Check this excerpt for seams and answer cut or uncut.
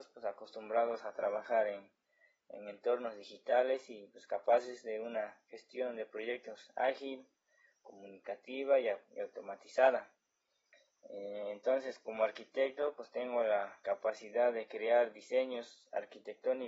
uncut